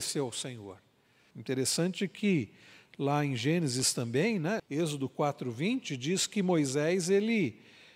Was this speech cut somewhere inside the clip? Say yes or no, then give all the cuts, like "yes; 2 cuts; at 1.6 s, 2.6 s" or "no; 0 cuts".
yes; 2 cuts; at 1.3 s, 4.6 s